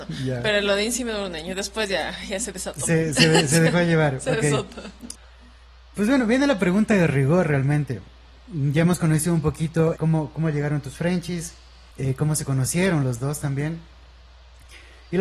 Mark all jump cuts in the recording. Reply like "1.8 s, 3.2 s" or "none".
10.0 s, 11.9 s